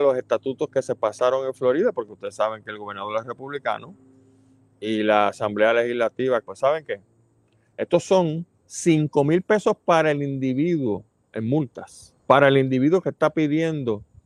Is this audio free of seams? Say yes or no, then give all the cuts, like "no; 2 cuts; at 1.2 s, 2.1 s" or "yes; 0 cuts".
no; 3 cuts; at 6.4 s, 8.5 s, 12.2 s